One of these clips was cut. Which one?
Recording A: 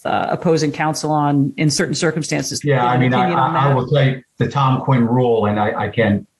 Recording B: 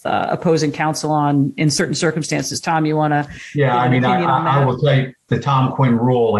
A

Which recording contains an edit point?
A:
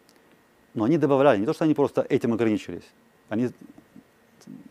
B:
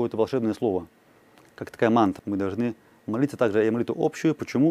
B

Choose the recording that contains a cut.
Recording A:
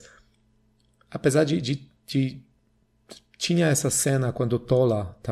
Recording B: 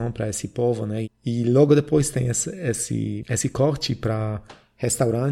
B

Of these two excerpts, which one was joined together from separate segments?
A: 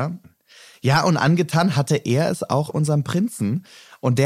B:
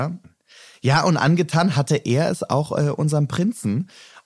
A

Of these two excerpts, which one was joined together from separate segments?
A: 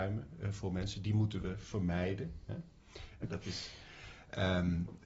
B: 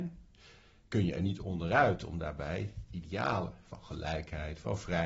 A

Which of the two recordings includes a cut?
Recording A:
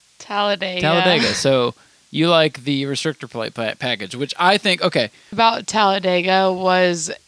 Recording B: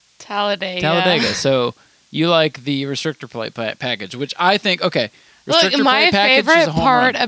A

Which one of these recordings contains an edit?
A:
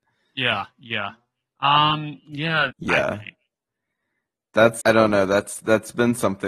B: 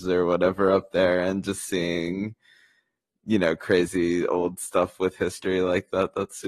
A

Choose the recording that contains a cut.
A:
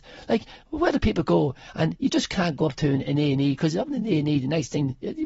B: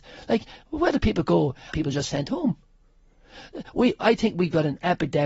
B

